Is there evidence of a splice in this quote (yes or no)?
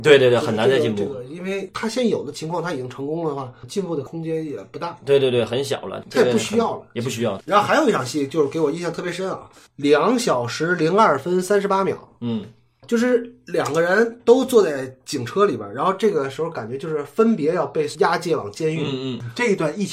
no